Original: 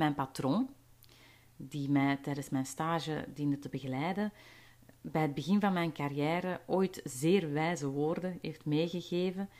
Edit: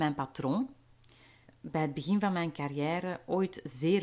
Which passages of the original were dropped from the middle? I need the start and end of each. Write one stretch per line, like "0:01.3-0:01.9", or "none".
0:01.5-0:04.9